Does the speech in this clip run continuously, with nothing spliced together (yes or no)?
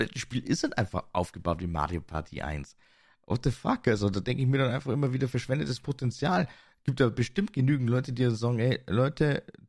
yes